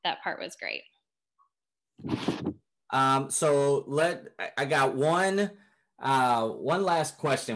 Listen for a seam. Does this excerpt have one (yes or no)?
no